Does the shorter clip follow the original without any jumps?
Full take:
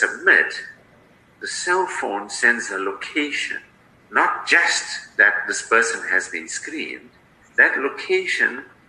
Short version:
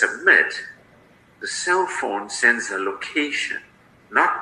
yes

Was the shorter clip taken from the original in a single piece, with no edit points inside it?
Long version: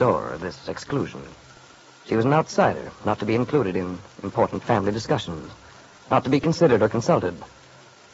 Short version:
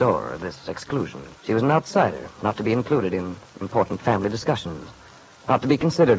no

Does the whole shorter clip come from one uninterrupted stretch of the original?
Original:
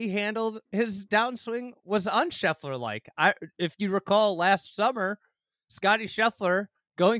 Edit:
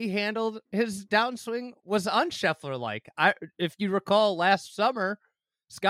yes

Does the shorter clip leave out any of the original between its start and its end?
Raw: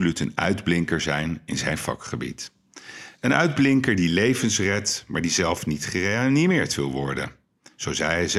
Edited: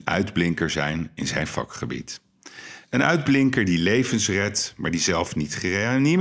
no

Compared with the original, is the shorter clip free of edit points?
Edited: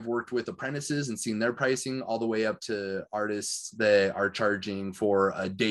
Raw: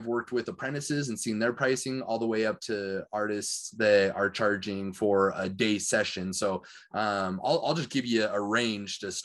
yes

